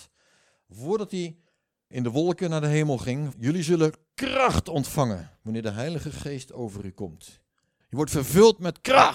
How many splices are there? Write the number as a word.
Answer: three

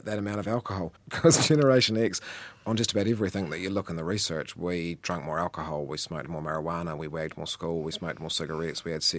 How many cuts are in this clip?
one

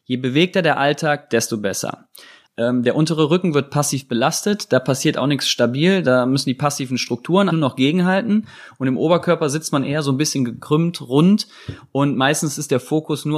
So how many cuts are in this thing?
two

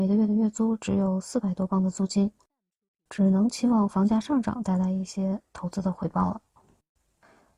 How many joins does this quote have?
zero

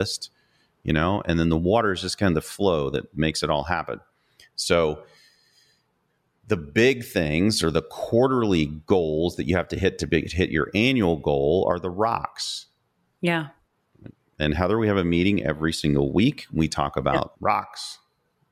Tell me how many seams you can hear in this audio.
zero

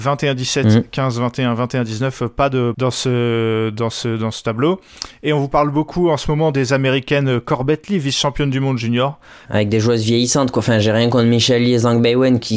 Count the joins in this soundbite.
two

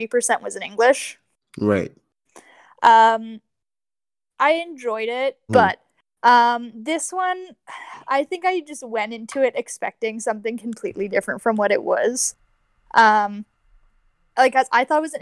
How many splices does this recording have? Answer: one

